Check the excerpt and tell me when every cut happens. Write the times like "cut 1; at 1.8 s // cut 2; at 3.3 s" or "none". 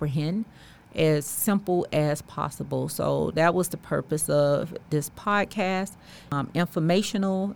none

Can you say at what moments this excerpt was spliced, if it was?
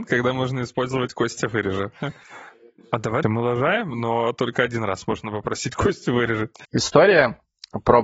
cut 1; at 3.2 s // cut 2; at 6.6 s

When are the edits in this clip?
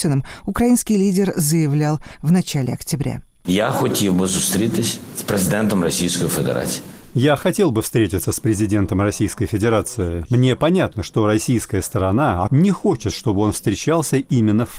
cut 1; at 10.2 s // cut 2; at 12.5 s

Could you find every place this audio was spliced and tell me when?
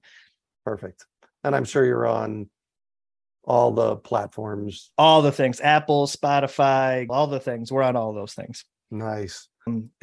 cut 1; at 7.1 s

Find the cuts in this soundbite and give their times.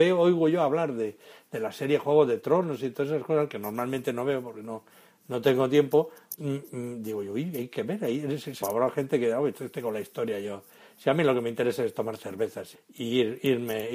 cut 1; at 6.4 s // cut 2; at 8.6 s // cut 3; at 12.7 s

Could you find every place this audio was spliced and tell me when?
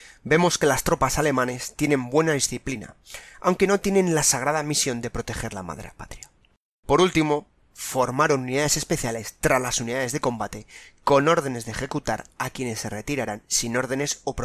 cut 1; at 6.7 s

